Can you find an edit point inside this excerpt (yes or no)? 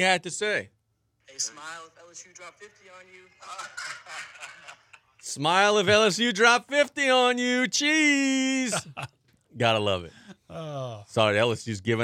no